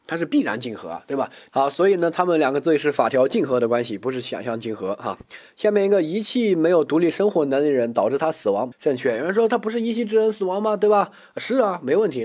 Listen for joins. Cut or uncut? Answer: cut